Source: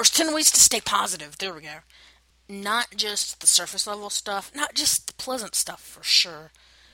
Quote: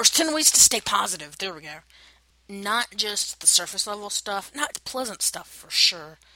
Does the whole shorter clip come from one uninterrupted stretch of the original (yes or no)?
no